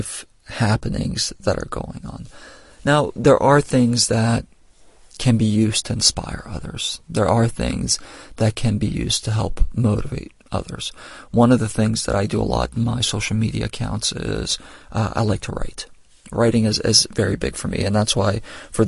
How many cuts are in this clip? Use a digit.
0